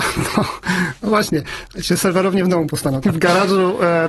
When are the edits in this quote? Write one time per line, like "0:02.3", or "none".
0:03.0